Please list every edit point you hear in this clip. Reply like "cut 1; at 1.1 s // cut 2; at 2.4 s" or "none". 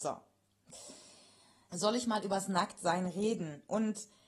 cut 1; at 1.7 s